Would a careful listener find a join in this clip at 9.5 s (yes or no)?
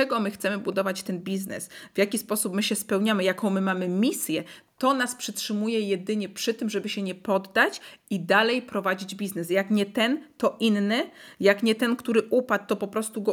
no